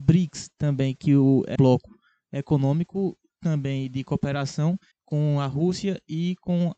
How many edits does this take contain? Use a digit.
2